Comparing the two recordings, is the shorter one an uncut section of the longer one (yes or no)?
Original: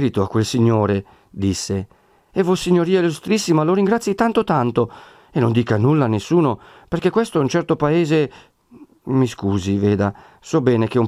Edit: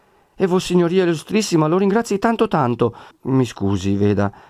no